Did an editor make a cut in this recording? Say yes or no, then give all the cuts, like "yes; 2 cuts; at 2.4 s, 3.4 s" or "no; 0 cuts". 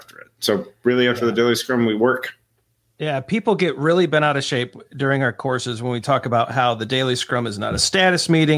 no; 0 cuts